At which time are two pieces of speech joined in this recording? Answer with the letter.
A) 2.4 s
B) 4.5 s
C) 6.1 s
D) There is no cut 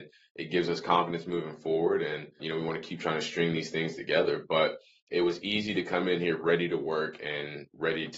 A